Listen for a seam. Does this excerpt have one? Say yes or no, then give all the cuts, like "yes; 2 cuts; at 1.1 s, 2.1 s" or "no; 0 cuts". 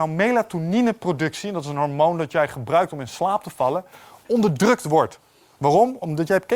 no; 0 cuts